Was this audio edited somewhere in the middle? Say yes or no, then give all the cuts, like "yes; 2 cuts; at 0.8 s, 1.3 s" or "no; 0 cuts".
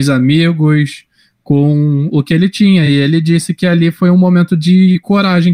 no; 0 cuts